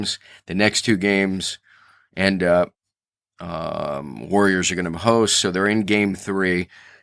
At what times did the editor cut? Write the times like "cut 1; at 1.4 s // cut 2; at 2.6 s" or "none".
none